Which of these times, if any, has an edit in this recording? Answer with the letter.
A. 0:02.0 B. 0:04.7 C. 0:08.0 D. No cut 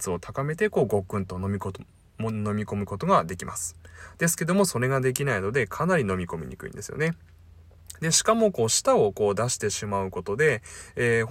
D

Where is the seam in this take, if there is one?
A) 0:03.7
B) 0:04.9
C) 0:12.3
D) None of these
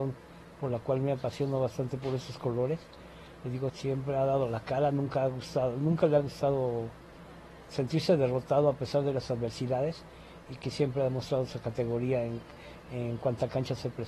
A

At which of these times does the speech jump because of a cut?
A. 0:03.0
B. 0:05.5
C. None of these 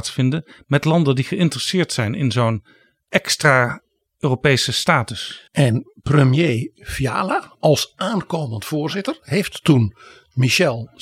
B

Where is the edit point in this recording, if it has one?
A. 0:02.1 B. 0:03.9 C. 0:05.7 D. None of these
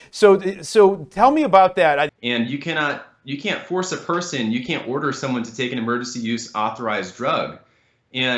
A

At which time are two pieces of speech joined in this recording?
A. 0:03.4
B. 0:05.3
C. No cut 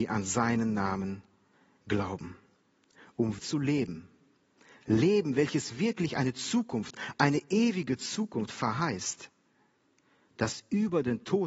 A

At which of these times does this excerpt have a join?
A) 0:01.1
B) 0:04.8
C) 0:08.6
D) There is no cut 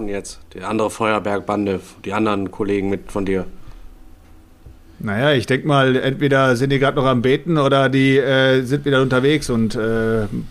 D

